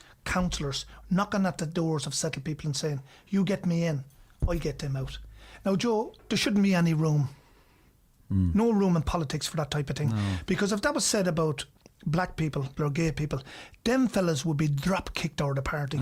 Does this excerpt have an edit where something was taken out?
yes; 1 cut; at 12.8 s

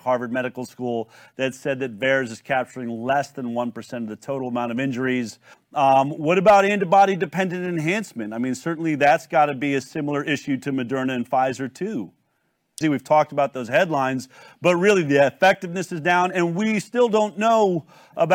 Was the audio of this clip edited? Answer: yes; 2 cuts; at 5.5 s, 12.8 s

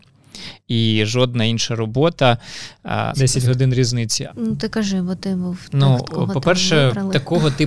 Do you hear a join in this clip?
yes; 2 cuts; at 3.1 s, 4.3 s

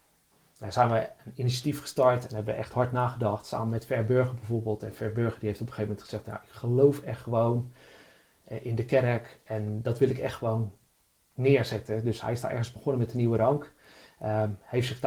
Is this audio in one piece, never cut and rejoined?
yes; 0 cuts

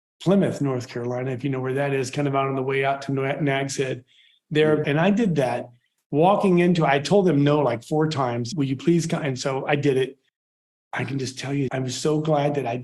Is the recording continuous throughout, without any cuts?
no; 3 cuts; at 4.8 s, 8.5 s, 11.7 s

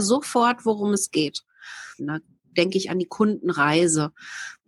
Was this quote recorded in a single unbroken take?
no; 1 cut; at 2.0 s

